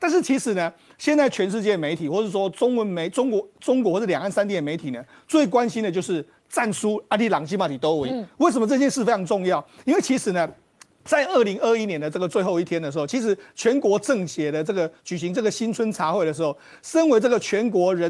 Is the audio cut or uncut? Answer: uncut